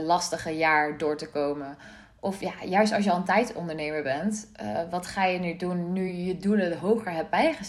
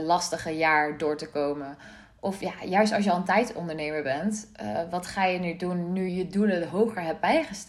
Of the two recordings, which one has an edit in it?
second; 1 cut; at 6.1 s

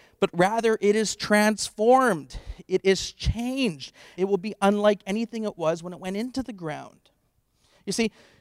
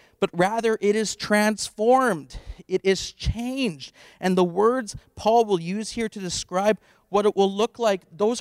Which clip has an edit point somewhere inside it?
first; 1 cut; at 4.1 s

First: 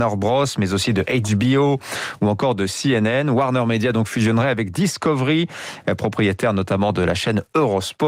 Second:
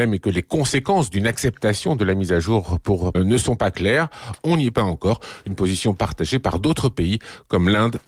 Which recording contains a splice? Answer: second; 2 cuts; at 3.1 s, 4.4 s

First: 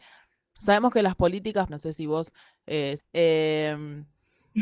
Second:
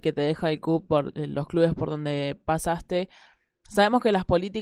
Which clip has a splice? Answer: first; 2 cuts; at 1.7 s, 3.0 s

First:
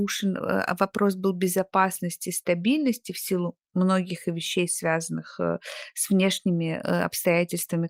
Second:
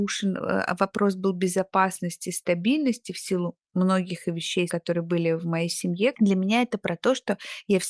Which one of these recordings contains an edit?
second; 2 cuts; at 4.7 s, 6.1 s

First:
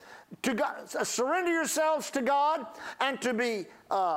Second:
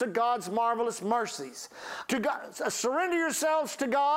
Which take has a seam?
second; 1 cut; at 2.1 s

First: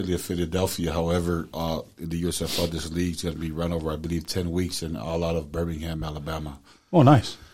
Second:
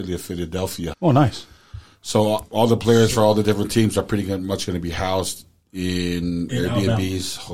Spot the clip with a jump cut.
second; 2 cuts; at 0.9 s, 2.5 s

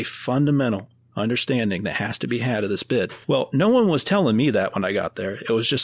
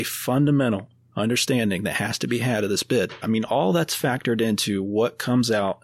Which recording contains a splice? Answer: second; 1 cut; at 3.2 s

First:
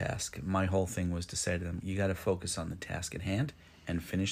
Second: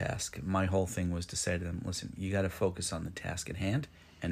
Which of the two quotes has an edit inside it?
first; 1 cut; at 1.8 s

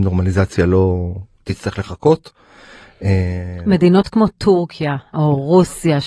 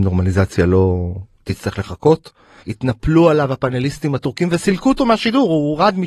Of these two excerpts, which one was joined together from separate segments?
second; 1 cut; at 2.6 s

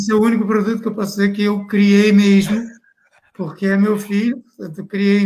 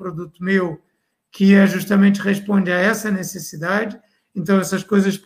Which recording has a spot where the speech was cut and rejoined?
second; 1 cut; at 4.2 s

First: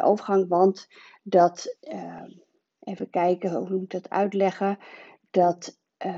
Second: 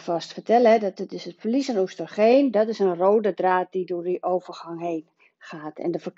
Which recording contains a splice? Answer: first; 1 cut; at 1.8 s

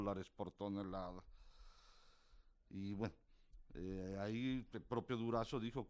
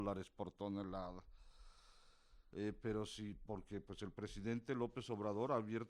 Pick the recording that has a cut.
second; 1 cut; at 2.5 s

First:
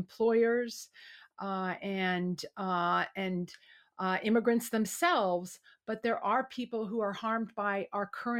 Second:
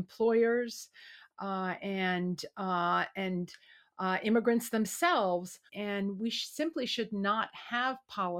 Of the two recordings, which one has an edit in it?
second; 1 cut; at 5.7 s

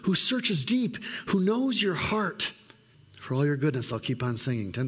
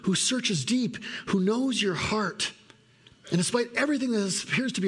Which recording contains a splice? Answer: first; 1 cut; at 2.9 s

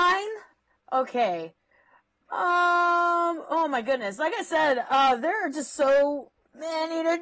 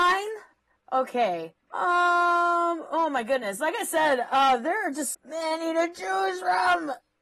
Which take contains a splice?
second; 2 cuts; at 1.6 s, 5.1 s

